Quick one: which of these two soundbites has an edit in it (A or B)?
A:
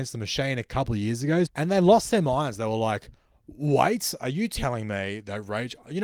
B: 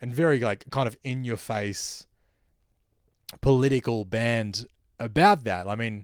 A